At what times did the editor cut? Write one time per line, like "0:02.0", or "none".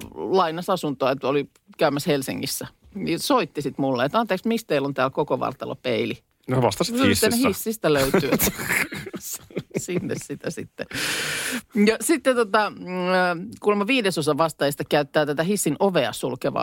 none